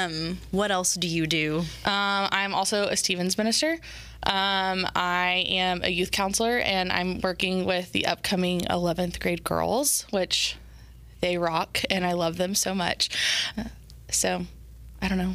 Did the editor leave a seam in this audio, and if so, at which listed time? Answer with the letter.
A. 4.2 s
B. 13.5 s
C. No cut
B